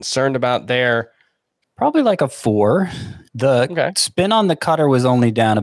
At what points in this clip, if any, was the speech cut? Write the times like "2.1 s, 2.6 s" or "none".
1.6 s, 3.3 s